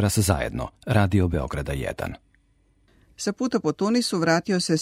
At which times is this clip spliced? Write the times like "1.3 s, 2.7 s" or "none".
3.1 s